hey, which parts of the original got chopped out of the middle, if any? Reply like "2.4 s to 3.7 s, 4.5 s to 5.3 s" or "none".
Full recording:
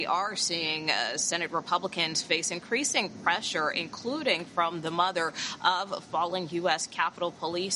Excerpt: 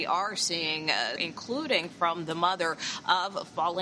1.2 s to 3.7 s

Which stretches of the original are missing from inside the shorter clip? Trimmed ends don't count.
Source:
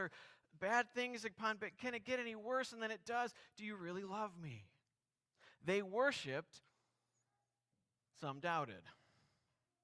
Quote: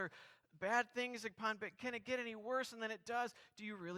none

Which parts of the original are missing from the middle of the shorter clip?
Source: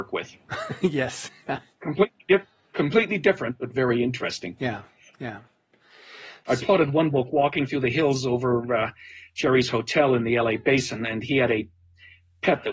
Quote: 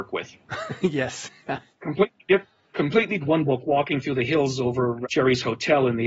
3.2 s to 6.9 s, 8.7 s to 9.3 s

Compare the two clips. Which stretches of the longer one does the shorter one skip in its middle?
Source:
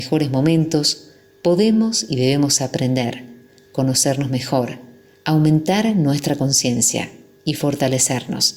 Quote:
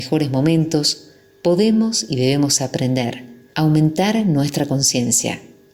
3.5 s to 5.2 s

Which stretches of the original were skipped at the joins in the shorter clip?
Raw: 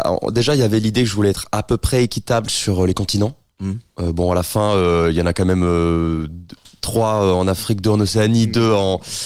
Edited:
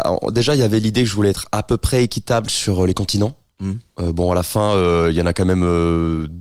none

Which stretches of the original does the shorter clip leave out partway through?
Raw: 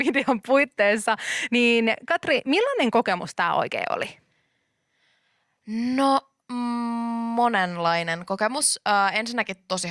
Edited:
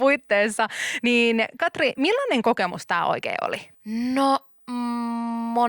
4.2 s to 5.6 s

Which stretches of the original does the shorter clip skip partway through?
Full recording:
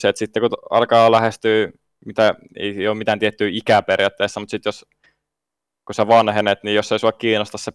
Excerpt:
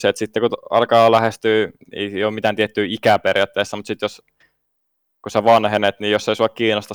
1.8 s to 2.4 s

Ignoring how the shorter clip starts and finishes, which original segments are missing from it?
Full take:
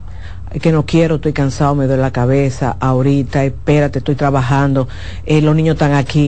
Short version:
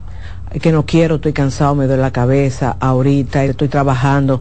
3.5 s to 3.9 s

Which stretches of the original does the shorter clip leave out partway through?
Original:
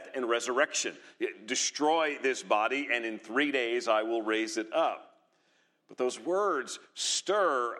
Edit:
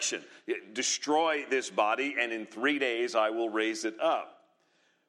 none

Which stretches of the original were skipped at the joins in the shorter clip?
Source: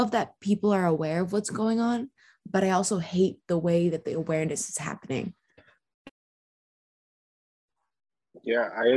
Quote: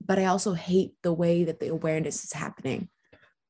none

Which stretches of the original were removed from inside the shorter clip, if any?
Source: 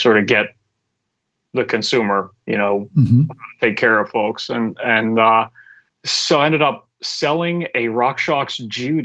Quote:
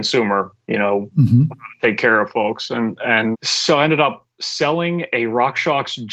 5.1 s to 5.9 s

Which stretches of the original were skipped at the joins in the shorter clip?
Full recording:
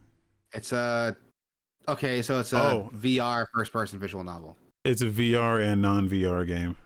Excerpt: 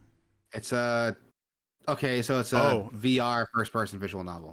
none

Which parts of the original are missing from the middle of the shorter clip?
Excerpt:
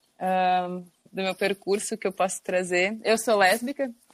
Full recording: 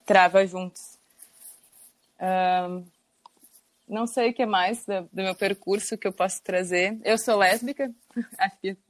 3.1 s to 5.1 s

